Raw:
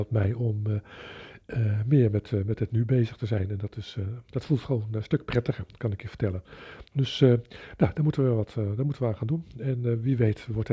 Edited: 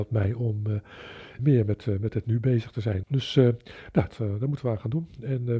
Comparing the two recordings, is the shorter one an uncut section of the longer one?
no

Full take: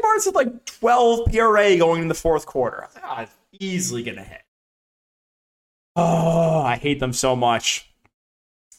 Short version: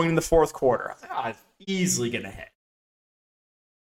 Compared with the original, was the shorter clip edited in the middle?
no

